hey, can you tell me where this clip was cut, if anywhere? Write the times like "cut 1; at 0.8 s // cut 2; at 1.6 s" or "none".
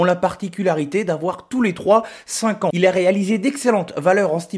cut 1; at 2.7 s